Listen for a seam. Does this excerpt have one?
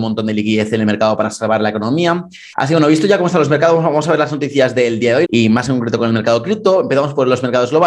yes; 2 cuts; at 2.5 s, 5.2 s

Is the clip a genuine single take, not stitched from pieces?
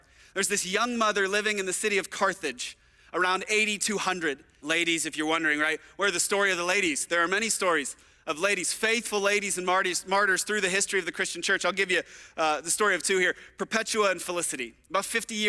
no; 1 cut; at 4.6 s

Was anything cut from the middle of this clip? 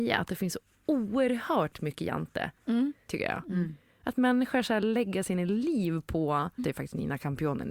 yes; 2 cuts; at 3.1 s, 6.6 s

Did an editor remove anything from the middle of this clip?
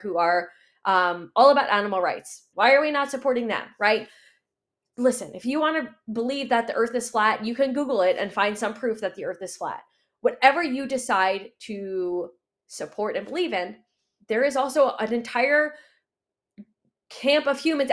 yes; 1 cut; at 2.5 s

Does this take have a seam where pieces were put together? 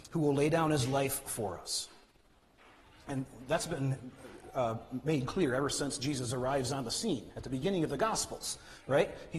no; 0 cuts

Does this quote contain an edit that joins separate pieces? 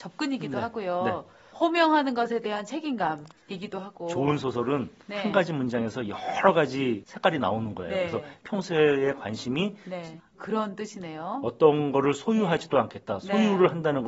yes; 1 cut; at 10.2 s

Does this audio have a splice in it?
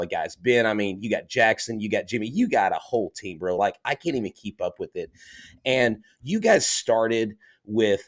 no; 0 cuts

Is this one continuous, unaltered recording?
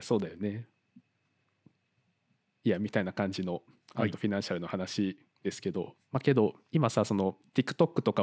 yes; 0 cuts

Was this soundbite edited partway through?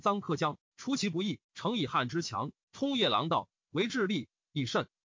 yes; 2 cuts; at 1.4 s, 2.6 s

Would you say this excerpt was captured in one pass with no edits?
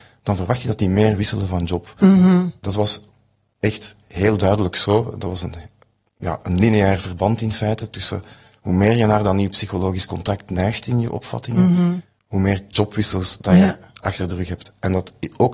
yes; 0 cuts

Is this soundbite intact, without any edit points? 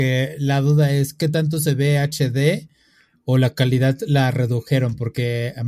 yes; 0 cuts

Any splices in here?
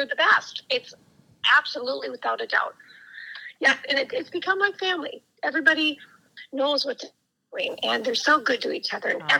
no; 0 cuts

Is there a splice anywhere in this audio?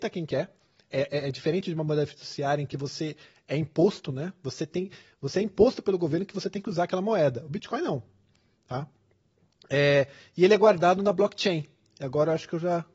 no; 0 cuts

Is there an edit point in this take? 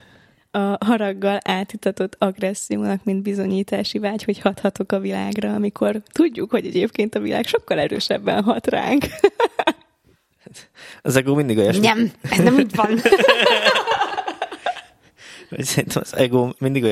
no; 0 cuts

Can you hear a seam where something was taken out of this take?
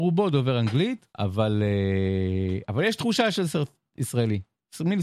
yes; 1 cut; at 1.1 s

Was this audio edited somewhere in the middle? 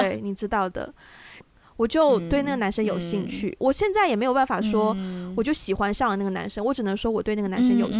yes; 1 cut; at 1.4 s

